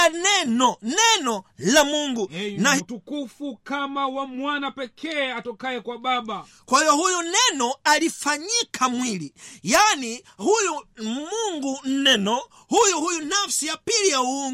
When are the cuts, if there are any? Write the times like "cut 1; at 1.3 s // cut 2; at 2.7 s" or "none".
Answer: cut 1; at 2.8 s